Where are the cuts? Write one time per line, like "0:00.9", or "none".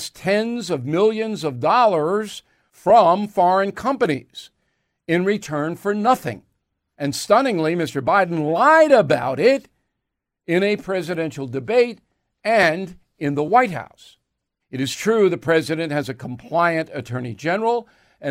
0:06.9
0:14.6

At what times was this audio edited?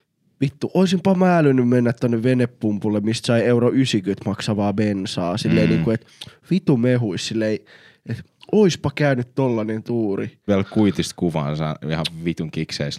0:10.5

